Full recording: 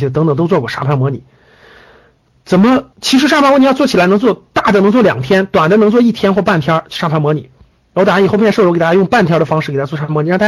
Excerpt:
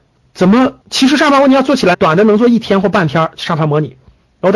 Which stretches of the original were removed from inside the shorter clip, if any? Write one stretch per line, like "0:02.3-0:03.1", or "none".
0:04.0-0:05.5